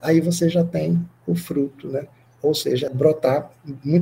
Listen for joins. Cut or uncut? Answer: cut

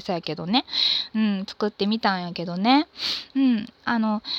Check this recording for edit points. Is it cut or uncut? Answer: uncut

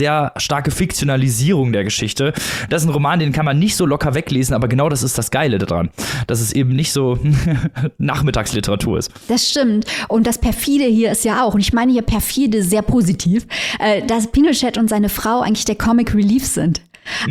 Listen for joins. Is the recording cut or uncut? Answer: uncut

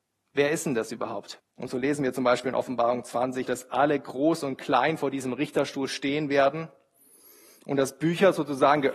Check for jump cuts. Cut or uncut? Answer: cut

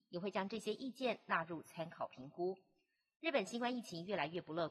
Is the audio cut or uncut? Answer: uncut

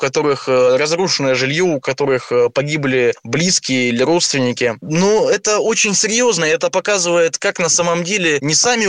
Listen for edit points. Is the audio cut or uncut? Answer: uncut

